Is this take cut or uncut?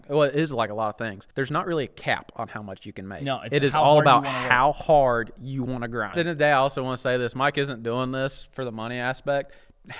cut